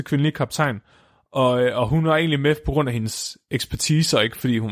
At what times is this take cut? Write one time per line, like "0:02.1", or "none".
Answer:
none